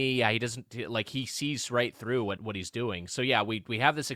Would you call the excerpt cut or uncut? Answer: cut